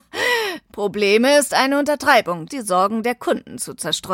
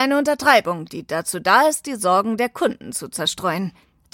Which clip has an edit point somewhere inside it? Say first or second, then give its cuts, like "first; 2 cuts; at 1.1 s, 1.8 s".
first; 1 cut; at 2.5 s